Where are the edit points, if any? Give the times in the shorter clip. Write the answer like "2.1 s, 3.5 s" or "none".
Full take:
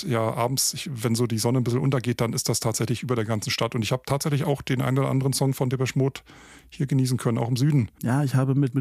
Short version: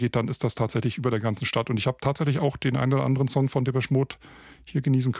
none